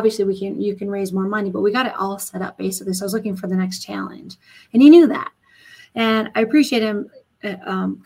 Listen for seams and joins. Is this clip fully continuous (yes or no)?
yes